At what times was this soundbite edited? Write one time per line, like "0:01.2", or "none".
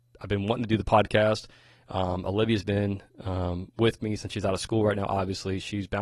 none